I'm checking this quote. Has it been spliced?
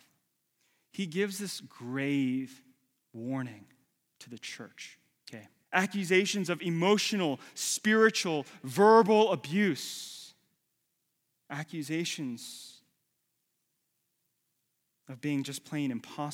yes; 1 cut; at 5.6 s

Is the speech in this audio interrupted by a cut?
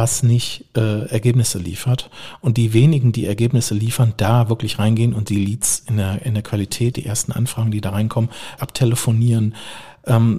yes; 2 cuts; at 6.9 s, 8.6 s

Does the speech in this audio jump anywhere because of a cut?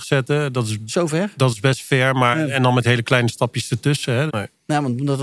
yes; 1 cut; at 4.3 s

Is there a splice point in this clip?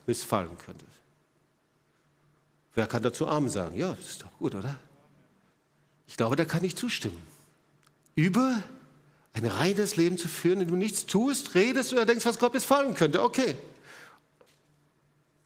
no; 0 cuts

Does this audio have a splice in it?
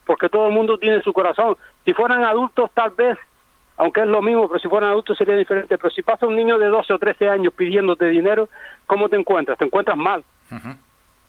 no; 0 cuts

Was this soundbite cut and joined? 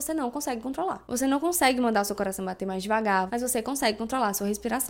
yes; 1 cut; at 3.3 s

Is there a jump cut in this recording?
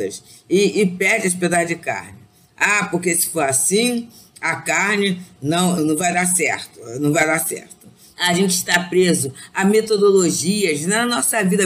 yes; 2 cuts; at 5.8 s, 8.1 s

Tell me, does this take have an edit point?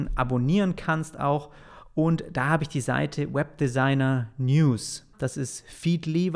yes; 1 cut; at 5.1 s

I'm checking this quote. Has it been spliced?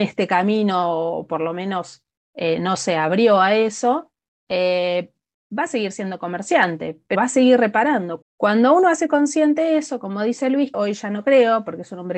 yes; 3 cuts; at 7.1 s, 8.2 s, 10.7 s

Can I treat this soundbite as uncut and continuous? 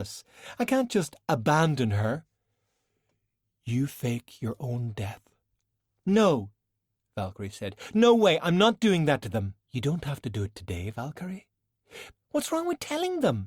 no; 2 cuts; at 9.6 s, 12.1 s

